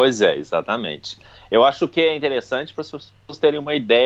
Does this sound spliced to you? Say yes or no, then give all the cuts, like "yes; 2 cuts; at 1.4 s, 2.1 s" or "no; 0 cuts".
no; 0 cuts